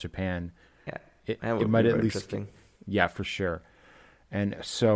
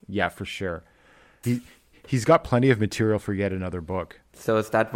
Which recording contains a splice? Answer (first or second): second